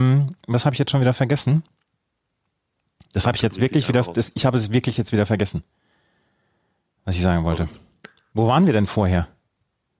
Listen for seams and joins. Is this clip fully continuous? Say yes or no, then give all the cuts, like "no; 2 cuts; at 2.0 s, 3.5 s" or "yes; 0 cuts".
yes; 0 cuts